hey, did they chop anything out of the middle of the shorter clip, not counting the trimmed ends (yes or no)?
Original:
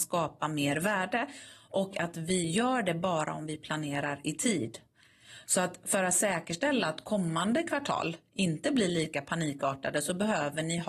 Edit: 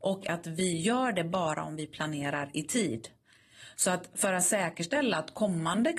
no